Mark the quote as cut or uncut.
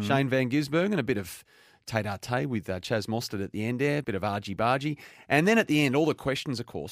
cut